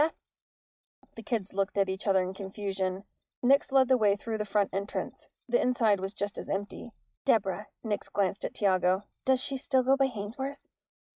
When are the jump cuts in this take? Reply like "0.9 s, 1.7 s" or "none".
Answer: 3.3 s, 7.2 s